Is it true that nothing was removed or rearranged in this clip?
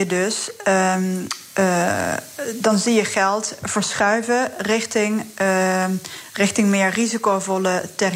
yes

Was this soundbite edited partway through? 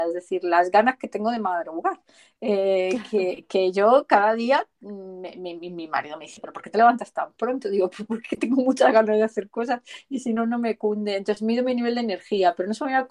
no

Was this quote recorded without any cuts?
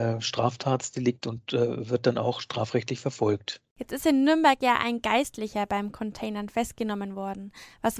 yes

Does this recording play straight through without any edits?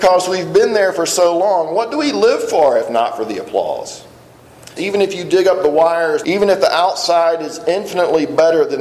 no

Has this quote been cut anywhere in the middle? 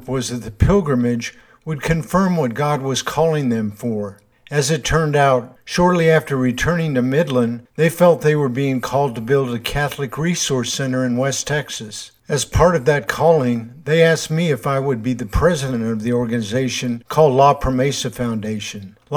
no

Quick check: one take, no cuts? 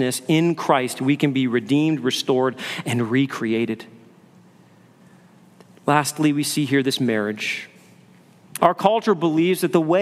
no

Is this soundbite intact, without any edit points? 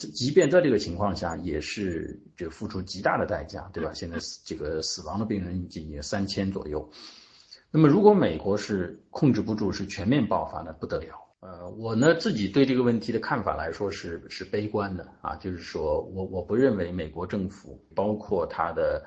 no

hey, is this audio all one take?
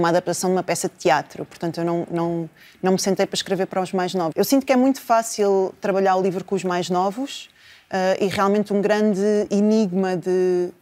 no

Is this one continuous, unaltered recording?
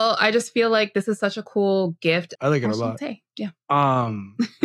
no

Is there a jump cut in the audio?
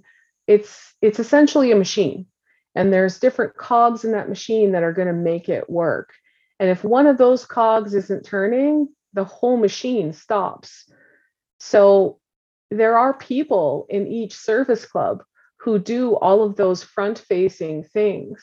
no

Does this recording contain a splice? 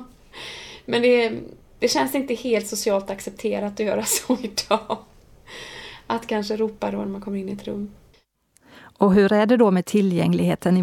no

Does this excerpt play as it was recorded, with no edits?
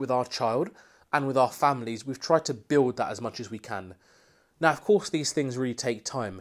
yes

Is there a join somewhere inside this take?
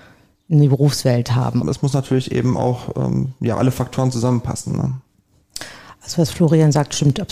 yes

